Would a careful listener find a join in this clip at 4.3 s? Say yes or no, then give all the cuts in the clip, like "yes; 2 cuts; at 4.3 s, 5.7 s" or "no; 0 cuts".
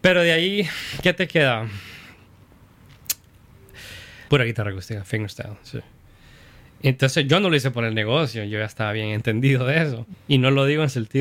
yes; 2 cuts; at 4.3 s, 10.1 s